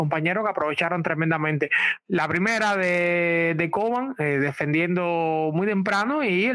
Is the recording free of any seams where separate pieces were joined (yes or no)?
no